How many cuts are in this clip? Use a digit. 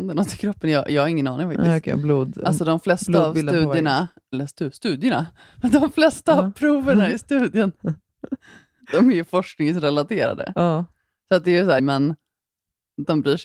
1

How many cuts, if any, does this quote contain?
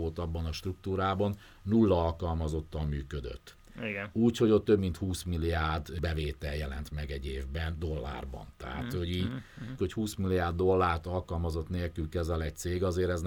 1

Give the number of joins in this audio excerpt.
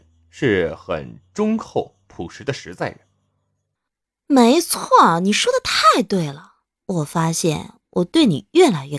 1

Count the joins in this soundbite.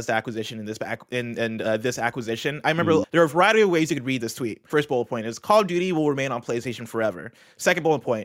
2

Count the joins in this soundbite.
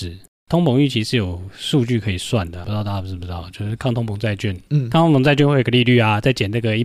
1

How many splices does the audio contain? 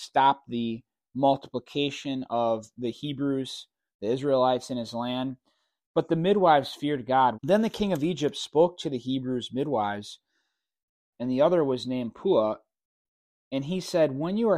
2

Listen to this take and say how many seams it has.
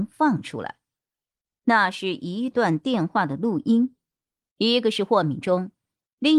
2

